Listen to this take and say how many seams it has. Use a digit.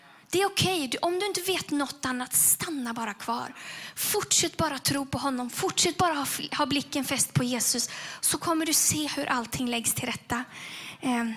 1